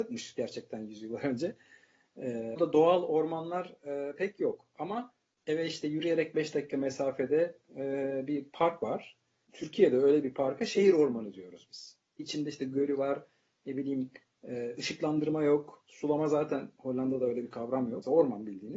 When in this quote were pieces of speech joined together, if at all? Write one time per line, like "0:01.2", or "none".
none